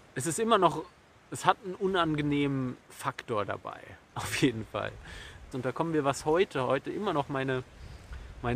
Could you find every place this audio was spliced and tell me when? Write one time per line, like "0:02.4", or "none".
0:05.5